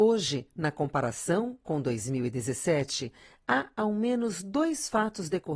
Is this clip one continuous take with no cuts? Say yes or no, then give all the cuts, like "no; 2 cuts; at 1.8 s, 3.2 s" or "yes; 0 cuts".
yes; 0 cuts